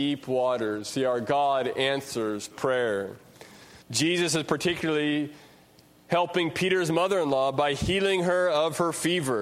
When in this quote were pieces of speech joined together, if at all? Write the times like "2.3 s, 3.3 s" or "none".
3.8 s